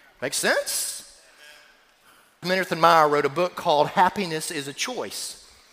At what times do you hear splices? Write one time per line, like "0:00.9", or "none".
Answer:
0:02.4